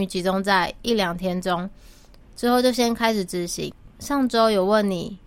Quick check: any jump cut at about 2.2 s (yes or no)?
yes